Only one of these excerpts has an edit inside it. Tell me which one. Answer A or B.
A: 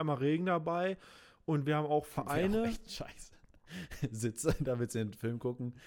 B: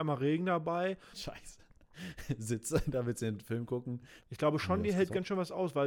B